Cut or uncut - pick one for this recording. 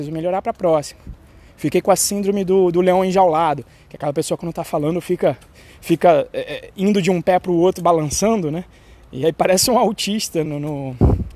cut